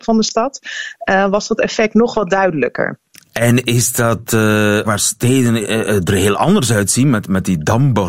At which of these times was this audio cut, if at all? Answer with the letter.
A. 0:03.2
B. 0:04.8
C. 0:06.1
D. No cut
B